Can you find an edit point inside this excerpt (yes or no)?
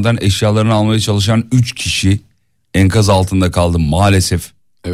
no